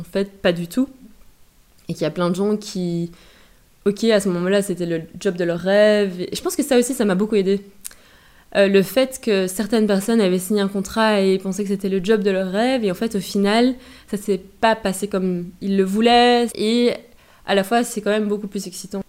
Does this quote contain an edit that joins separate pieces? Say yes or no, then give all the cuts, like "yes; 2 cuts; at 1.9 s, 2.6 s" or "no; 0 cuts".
yes; 1 cut; at 16.5 s